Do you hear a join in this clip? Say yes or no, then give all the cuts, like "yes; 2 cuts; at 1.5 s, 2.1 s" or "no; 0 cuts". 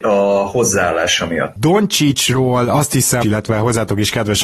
yes; 2 cuts; at 1.6 s, 3.2 s